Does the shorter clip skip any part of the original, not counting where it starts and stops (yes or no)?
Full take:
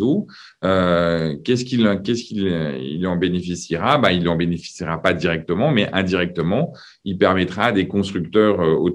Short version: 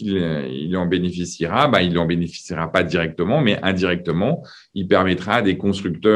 no